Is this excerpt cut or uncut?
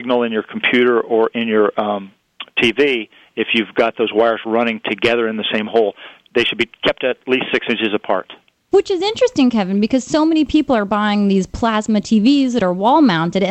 uncut